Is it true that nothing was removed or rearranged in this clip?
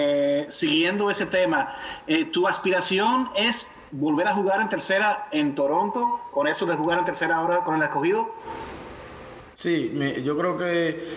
yes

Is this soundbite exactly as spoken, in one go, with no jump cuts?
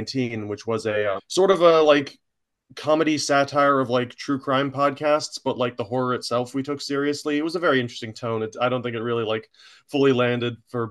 no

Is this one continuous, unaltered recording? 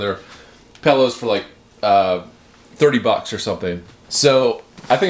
no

